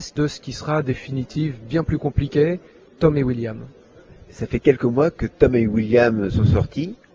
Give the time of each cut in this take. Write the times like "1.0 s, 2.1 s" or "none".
none